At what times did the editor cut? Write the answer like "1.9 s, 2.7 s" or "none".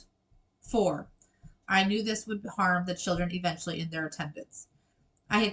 1.6 s